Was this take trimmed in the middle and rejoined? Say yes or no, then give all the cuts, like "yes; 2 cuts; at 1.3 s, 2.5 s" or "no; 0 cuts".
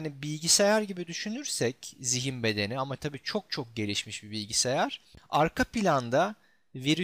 no; 0 cuts